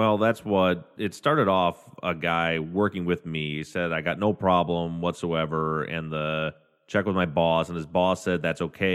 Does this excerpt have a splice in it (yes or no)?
no